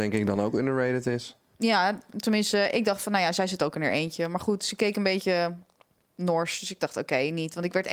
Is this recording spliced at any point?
no; 0 cuts

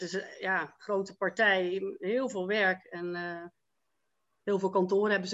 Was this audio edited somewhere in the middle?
no; 0 cuts

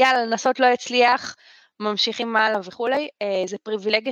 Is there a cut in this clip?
no; 0 cuts

